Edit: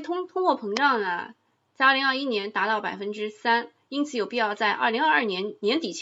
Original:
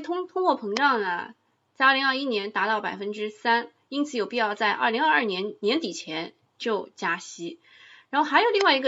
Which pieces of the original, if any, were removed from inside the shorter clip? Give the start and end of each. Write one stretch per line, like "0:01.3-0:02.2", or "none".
none